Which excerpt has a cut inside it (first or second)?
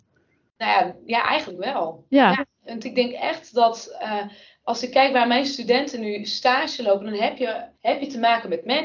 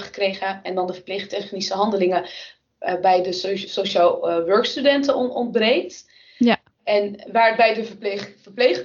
first